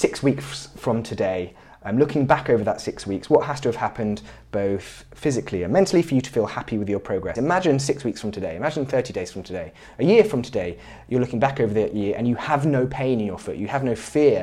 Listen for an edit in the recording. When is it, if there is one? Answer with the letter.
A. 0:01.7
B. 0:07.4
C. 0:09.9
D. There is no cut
B